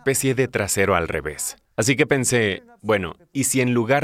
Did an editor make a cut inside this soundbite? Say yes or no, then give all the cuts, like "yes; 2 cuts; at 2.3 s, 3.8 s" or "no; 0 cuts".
no; 0 cuts